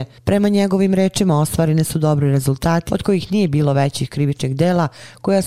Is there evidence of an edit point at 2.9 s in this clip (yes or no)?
yes